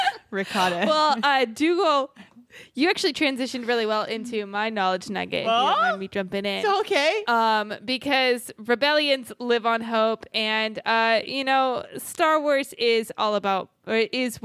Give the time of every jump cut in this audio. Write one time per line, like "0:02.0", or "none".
none

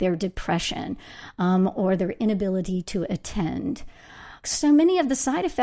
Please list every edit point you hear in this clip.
0:04.4

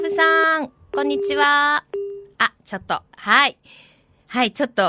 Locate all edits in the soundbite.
none

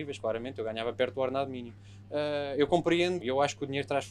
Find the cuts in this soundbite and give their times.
0:02.0
0:03.2

